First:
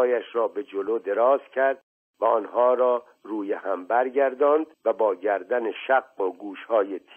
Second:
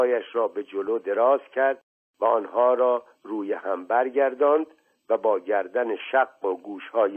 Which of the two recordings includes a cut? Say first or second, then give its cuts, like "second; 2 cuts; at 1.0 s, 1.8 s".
first; 1 cut; at 4.7 s